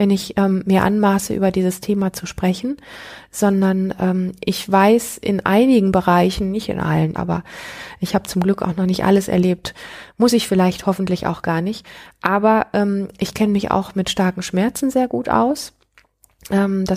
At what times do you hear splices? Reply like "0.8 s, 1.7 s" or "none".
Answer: 7.2 s